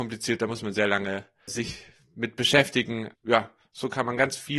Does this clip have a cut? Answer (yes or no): yes